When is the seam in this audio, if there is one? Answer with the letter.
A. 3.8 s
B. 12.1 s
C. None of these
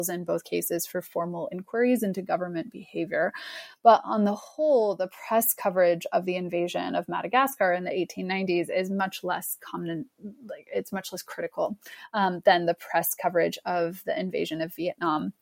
C